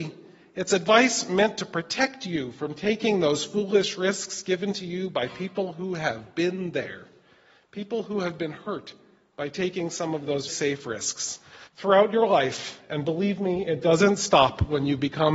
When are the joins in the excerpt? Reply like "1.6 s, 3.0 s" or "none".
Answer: 10.5 s, 11.7 s

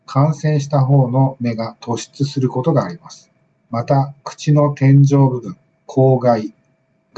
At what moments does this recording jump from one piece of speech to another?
3.5 s

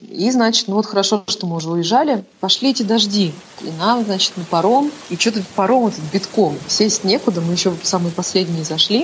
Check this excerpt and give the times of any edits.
5.0 s

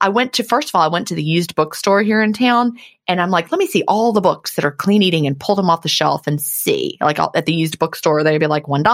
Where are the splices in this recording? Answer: none

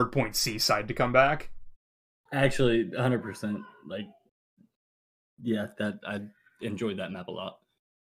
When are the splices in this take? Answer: none

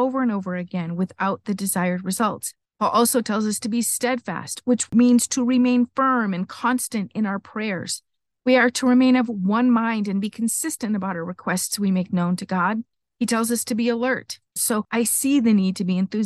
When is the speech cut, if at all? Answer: 2.6 s, 14.6 s

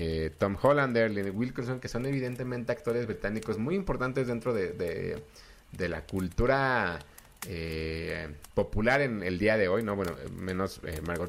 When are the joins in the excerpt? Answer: none

